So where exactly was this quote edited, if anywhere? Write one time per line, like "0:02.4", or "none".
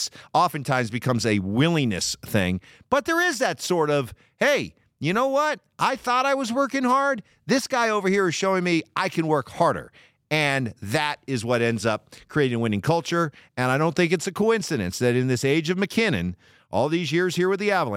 none